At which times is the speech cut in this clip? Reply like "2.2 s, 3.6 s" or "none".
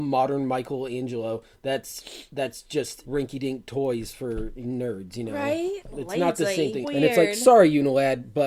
3.0 s, 6.8 s

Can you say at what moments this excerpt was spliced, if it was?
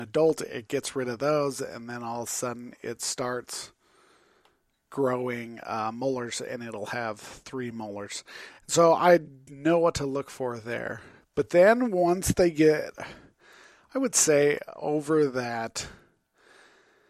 none

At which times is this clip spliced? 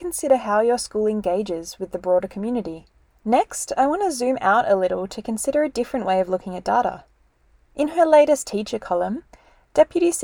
3.1 s

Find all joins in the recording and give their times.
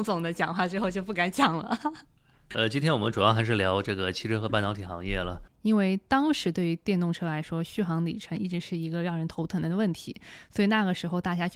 5.5 s

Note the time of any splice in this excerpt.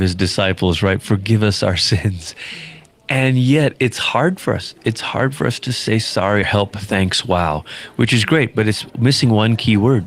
6.4 s

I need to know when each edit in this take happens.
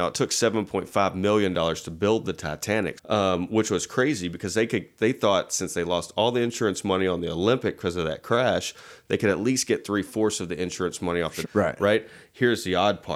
3.0 s, 11.4 s

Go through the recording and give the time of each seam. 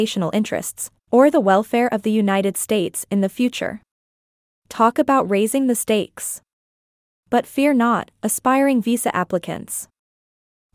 none

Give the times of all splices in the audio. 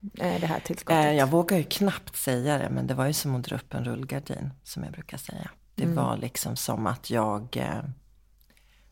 none

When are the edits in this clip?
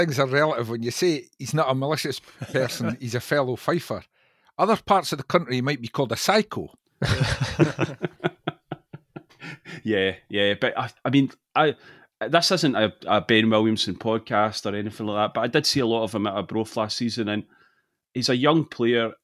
none

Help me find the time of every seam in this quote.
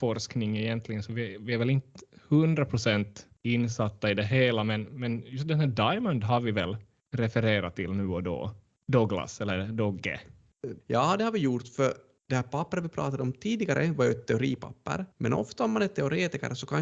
10.8 s, 15.1 s

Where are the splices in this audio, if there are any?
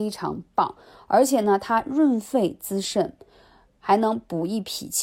none

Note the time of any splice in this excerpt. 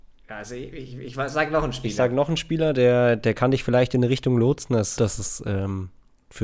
5.0 s

